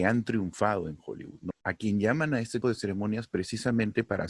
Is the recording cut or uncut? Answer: cut